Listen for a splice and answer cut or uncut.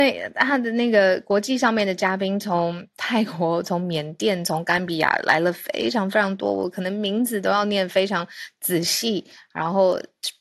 uncut